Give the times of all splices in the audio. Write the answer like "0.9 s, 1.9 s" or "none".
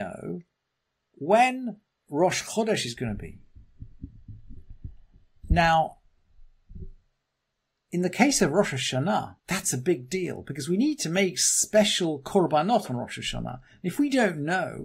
9.4 s

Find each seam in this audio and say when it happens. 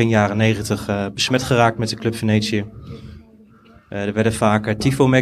none

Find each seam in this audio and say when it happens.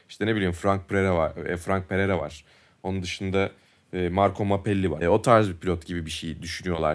5.0 s

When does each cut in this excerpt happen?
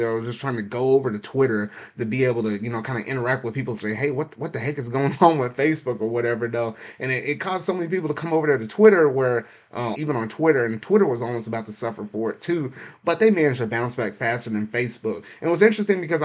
9.9 s

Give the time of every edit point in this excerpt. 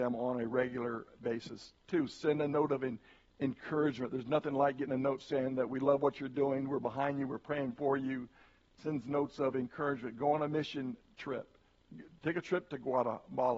none

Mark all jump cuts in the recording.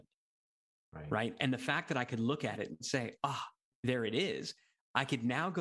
none

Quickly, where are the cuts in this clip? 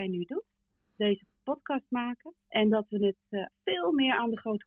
2.4 s, 3.5 s

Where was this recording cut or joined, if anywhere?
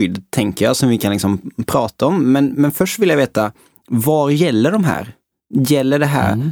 none

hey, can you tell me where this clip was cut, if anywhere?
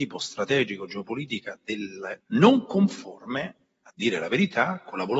2.2 s

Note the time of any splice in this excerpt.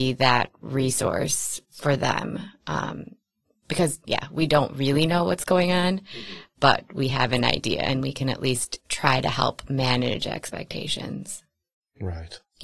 4.0 s

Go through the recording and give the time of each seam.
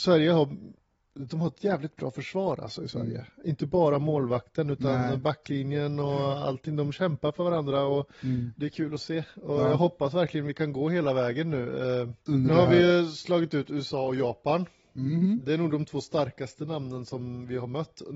12.3 s, 15.4 s

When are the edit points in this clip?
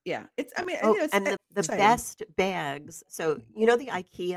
1.4 s

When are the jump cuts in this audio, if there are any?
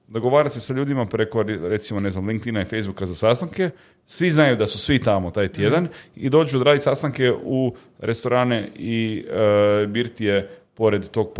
none

